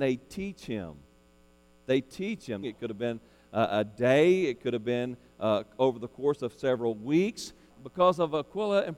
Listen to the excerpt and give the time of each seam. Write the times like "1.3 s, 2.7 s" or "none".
2.6 s, 7.7 s